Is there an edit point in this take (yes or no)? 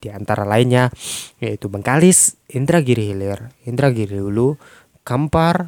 no